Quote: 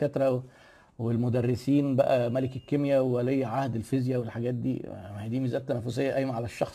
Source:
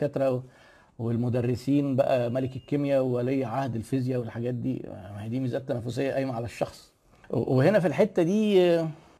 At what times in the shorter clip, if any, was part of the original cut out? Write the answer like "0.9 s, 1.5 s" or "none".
none